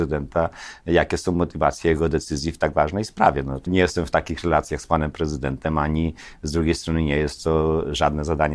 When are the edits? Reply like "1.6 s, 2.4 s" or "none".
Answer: 3.7 s